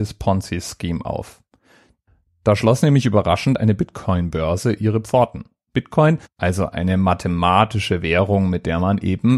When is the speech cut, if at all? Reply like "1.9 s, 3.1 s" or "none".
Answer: 6.3 s